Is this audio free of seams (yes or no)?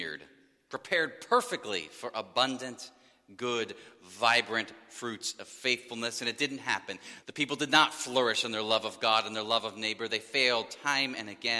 no